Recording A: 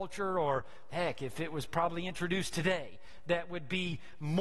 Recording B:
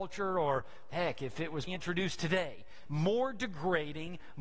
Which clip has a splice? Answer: B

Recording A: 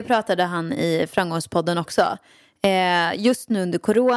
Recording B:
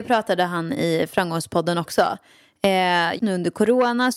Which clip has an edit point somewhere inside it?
B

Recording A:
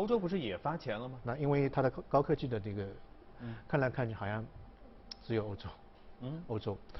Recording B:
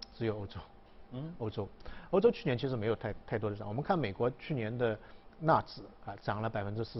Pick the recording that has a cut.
A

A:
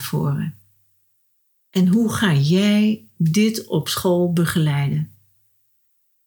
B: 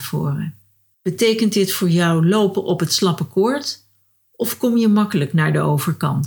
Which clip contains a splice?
B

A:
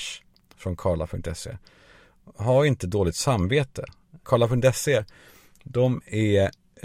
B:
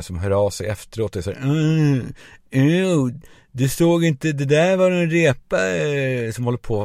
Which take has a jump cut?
A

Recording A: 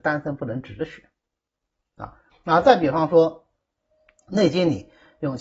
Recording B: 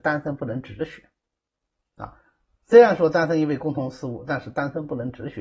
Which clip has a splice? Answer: A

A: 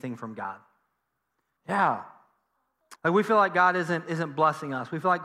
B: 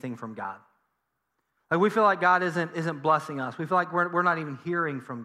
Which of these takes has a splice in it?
A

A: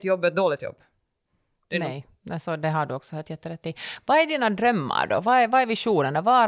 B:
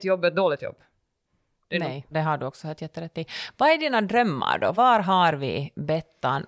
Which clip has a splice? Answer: B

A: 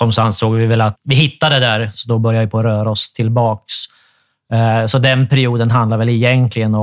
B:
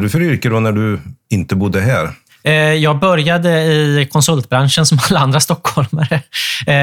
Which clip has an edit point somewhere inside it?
A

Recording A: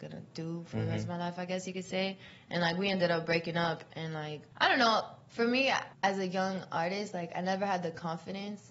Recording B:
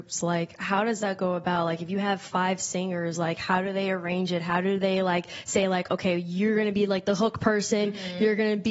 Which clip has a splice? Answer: A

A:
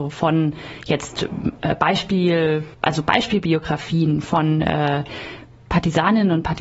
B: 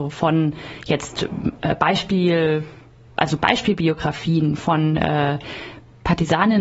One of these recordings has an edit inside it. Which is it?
A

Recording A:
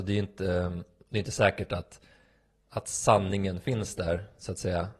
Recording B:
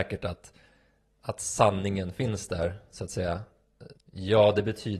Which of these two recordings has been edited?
B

